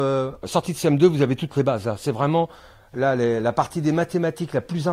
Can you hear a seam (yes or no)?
no